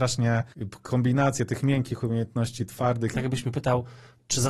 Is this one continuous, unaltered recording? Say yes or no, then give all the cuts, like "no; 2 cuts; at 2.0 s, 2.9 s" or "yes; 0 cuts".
no; 1 cut; at 3.1 s